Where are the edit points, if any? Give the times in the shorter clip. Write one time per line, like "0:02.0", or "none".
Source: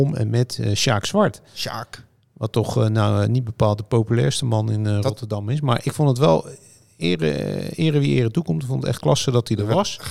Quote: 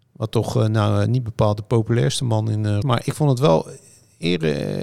0:02.8

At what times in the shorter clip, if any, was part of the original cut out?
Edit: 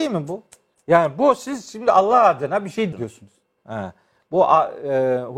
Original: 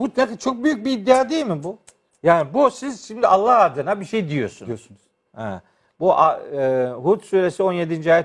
0:02.9

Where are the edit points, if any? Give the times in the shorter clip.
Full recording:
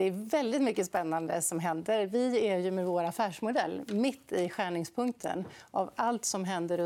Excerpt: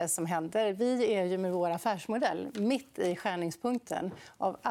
none

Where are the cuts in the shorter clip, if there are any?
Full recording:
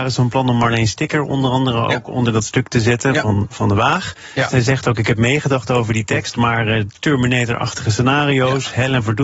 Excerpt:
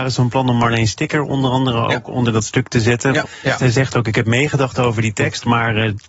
0:03.2

